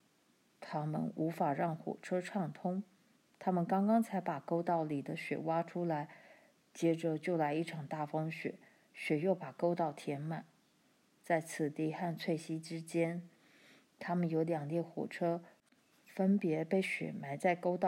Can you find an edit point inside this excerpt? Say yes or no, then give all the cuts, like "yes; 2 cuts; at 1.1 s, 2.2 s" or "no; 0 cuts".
no; 0 cuts